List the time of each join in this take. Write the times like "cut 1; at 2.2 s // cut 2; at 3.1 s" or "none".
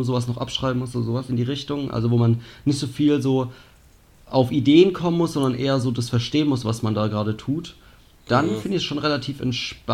none